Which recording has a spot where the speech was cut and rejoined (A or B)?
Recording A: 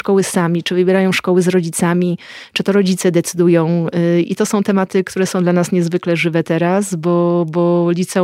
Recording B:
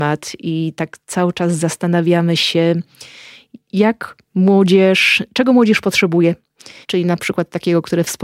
B